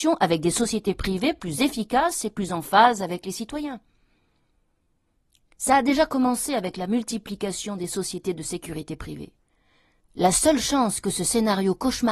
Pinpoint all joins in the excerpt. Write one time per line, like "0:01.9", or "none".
none